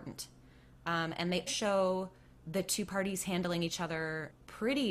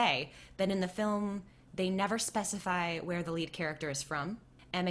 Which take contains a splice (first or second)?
first